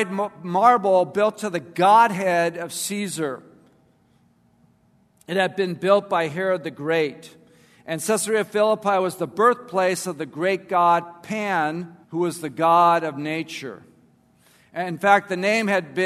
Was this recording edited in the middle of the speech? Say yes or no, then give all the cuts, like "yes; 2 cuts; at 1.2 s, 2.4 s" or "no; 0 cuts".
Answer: yes; 1 cut; at 12.0 s